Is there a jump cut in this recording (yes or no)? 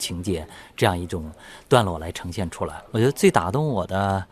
no